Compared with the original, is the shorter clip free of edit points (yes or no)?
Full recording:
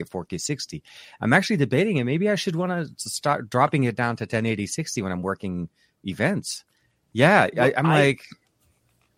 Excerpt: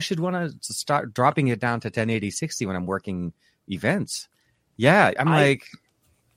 no